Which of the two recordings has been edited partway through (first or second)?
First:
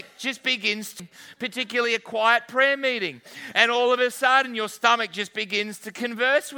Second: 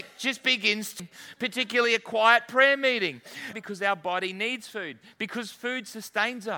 second